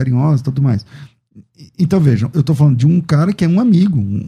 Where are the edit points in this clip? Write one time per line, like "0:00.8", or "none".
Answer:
none